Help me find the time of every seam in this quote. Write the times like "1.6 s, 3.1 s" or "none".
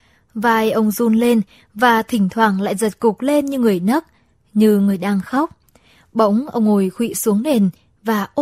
none